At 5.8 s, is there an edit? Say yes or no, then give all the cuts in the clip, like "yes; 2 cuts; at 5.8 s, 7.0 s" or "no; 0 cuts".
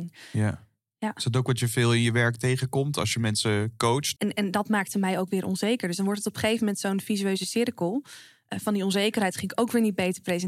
no; 1 cut; at 4.2 s